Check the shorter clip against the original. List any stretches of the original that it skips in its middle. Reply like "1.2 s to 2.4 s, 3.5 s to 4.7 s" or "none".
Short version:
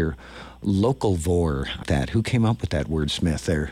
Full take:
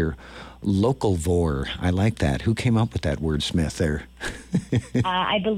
1.8 s to 2.1 s